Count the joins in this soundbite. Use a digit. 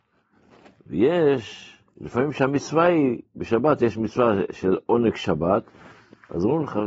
0